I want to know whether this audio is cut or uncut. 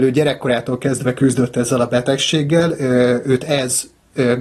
uncut